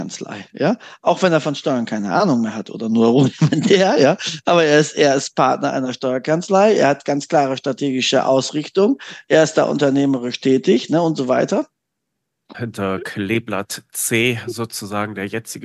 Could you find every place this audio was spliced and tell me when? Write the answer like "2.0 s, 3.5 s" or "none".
12.5 s